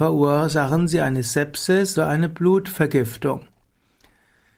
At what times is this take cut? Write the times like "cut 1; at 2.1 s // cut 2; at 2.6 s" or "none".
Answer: cut 1; at 2.0 s